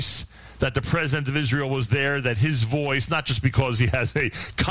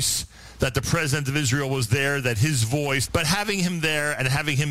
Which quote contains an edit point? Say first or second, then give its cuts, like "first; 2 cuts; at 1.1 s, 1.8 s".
second; 1 cut; at 3.1 s